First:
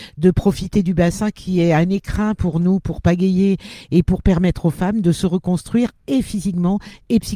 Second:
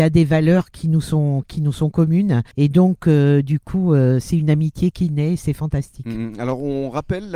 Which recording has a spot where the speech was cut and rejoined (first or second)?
second